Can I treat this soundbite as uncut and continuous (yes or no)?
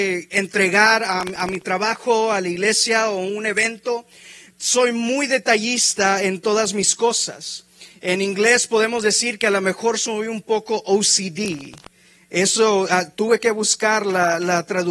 yes